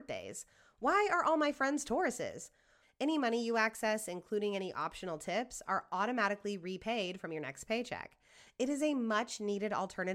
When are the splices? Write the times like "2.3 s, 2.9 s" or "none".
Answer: 2.8 s